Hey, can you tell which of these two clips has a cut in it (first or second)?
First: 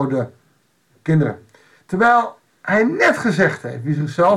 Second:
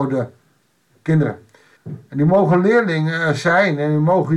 second